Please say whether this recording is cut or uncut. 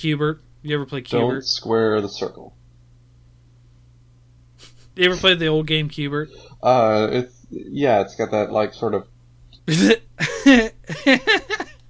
cut